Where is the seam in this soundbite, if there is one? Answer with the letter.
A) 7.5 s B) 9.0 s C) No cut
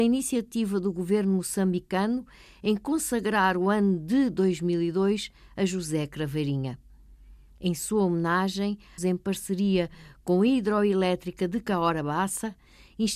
B